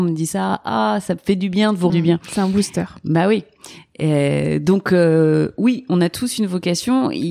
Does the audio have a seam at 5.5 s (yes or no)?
no